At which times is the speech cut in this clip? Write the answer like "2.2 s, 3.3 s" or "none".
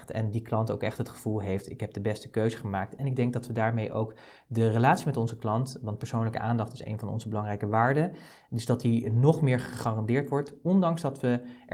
none